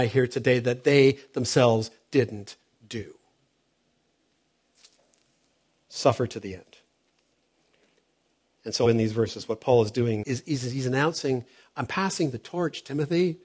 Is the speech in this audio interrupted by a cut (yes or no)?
yes